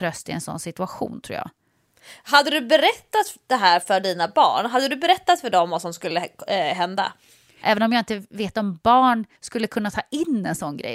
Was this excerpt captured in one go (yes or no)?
no